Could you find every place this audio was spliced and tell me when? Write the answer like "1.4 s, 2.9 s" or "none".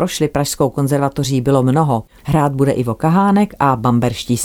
2.2 s